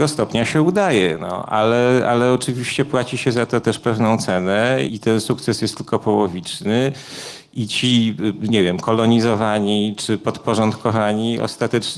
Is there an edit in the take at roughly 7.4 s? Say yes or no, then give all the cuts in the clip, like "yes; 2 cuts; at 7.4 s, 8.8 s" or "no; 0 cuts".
no; 1 cut; at 4.9 s